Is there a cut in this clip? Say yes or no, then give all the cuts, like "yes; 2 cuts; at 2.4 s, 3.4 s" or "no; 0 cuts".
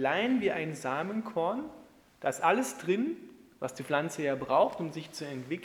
no; 0 cuts